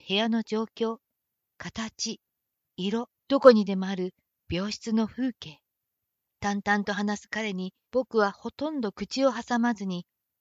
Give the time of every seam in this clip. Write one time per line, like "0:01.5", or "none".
0:03.2
0:06.2
0:07.8